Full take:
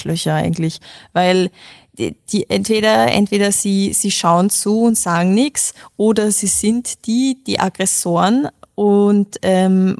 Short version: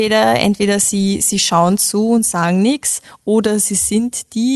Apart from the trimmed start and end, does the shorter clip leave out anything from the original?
no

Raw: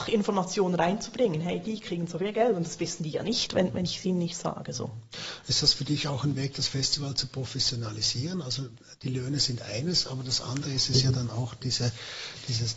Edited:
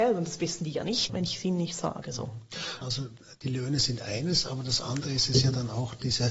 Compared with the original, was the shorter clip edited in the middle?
yes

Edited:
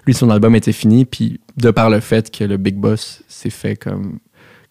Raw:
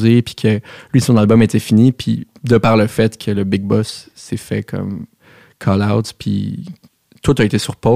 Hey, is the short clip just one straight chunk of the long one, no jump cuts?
yes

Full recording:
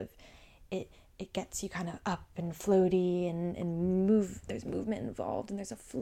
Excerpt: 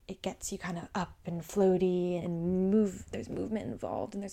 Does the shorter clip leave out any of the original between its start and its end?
yes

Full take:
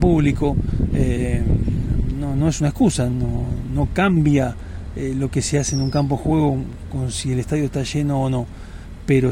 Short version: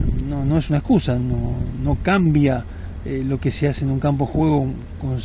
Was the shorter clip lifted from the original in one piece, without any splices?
yes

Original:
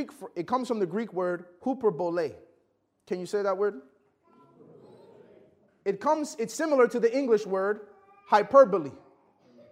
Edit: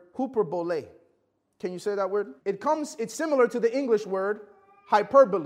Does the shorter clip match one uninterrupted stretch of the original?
no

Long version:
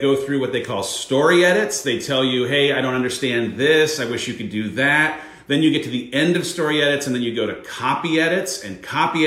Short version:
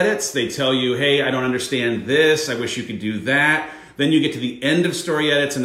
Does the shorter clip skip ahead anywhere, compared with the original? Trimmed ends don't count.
no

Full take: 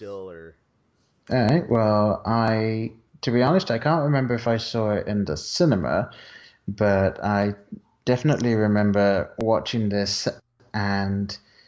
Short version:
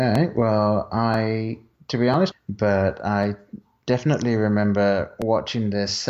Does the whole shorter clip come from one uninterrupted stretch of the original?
no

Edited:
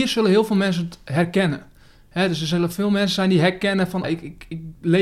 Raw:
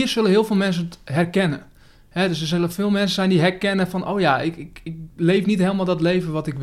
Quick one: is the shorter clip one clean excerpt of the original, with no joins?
no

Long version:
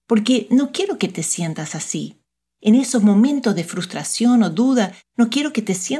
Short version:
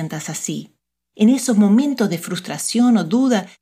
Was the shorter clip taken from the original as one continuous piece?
yes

